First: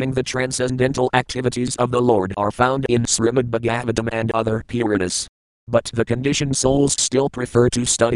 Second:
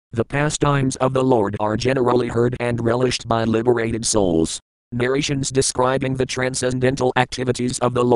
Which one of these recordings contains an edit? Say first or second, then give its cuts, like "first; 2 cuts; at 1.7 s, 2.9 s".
second; 1 cut; at 4.8 s